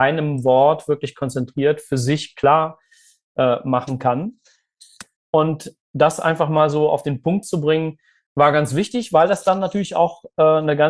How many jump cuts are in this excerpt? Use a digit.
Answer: 1